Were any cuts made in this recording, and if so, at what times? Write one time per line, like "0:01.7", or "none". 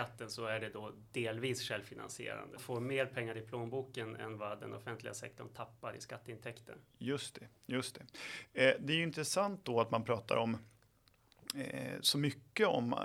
0:02.6